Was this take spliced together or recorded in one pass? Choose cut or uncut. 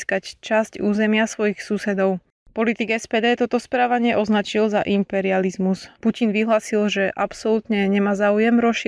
cut